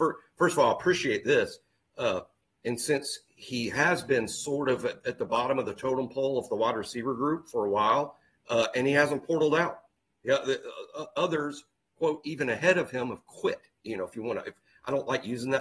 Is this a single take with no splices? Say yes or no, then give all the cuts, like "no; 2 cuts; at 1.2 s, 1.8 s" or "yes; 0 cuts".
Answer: yes; 0 cuts